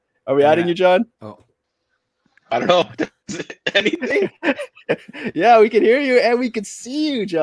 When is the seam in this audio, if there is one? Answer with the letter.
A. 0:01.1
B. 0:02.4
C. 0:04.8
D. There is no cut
A